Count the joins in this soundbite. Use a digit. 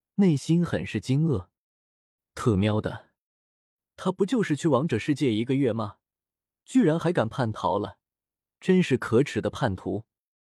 0